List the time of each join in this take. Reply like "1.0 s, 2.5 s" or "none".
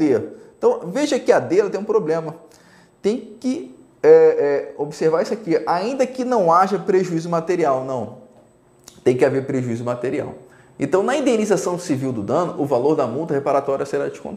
none